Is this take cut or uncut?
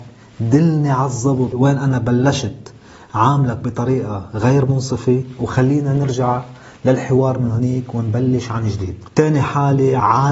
uncut